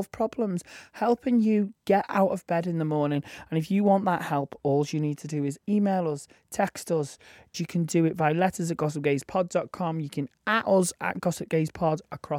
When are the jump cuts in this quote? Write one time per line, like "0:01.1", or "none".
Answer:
0:07.5

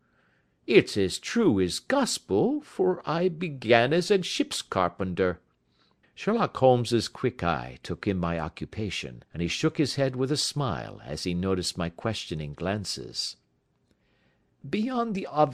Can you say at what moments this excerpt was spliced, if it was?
0:06.0
0:09.3

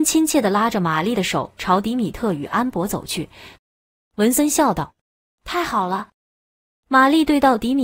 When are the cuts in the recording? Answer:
0:03.6
0:06.1

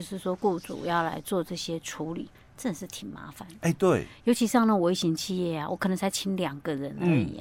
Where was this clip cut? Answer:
none

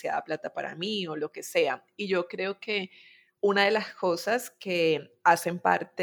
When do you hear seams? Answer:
none

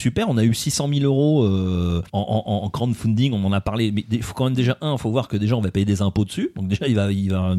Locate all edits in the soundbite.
0:02.1

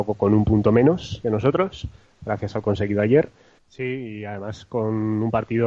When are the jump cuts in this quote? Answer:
0:03.6

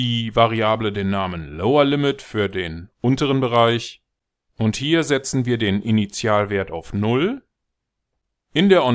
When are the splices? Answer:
none

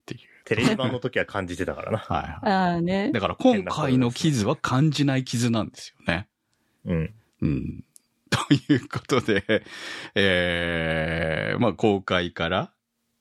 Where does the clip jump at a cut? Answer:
none

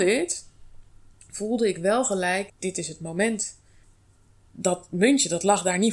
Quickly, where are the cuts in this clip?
0:02.5

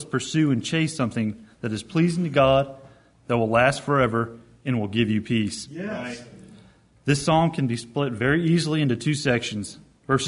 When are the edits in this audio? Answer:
none

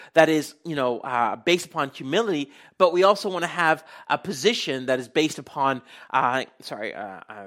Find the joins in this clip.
none

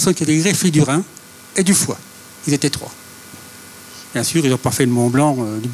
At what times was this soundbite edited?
none

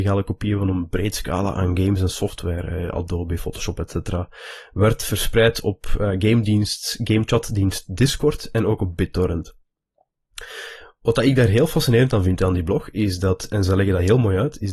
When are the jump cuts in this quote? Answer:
none

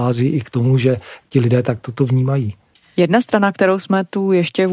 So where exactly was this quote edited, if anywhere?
none

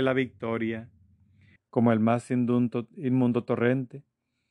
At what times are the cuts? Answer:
0:01.6

